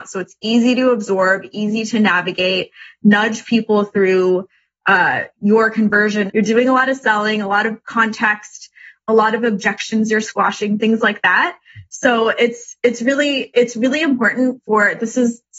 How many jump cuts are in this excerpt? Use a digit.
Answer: 1